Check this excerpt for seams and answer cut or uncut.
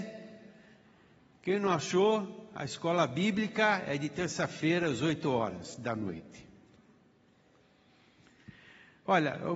uncut